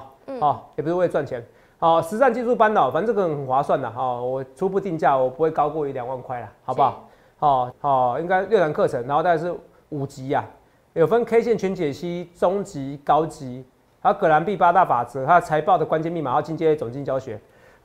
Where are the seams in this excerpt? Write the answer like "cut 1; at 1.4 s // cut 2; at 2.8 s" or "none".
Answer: cut 1; at 7.7 s